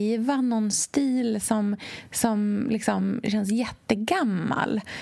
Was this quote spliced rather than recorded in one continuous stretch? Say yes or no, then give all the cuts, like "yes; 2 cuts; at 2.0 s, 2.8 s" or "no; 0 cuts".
no; 0 cuts